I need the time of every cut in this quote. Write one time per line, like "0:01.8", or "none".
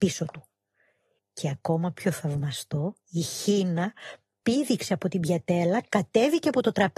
0:01.2
0:03.0